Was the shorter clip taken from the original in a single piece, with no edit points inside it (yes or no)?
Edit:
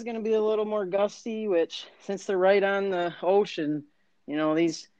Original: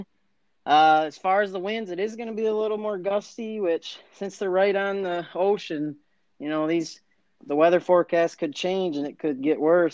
yes